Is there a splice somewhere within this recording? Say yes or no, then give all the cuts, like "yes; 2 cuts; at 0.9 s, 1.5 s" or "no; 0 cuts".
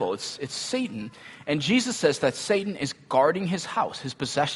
no; 0 cuts